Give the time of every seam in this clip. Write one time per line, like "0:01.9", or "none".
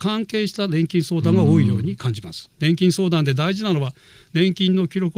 0:02.4

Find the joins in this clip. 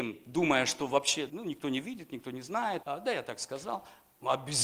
0:01.3
0:02.8

